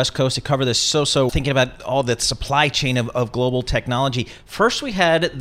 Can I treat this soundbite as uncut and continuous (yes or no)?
no